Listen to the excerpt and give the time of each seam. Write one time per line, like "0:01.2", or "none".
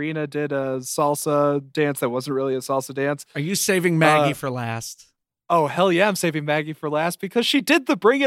none